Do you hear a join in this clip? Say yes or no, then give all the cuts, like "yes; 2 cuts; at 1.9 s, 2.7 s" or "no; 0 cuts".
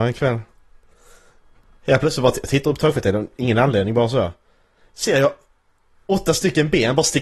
no; 0 cuts